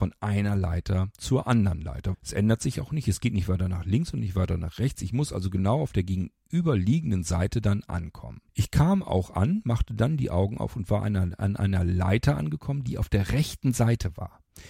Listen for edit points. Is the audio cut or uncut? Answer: cut